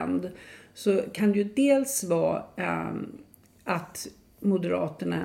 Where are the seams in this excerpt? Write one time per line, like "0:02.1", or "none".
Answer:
none